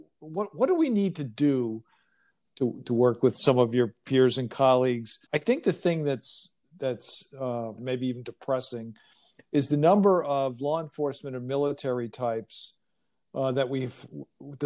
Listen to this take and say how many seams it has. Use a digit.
3